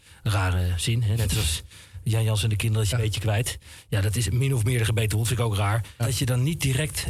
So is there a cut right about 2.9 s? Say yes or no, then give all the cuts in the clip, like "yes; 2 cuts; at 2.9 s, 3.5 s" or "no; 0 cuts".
yes; 2 cuts; at 2.9 s, 6.0 s